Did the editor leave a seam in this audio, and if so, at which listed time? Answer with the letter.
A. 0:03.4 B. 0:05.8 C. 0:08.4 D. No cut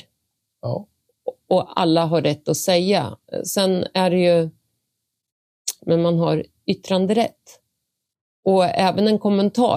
B